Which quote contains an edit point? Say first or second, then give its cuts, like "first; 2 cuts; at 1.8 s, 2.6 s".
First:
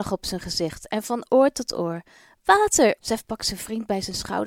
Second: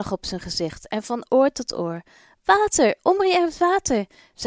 first; 1 cut; at 3.0 s